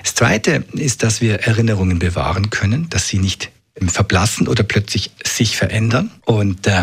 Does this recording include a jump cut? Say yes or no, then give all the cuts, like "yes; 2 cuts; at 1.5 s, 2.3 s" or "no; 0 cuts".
yes; 1 cut; at 3.8 s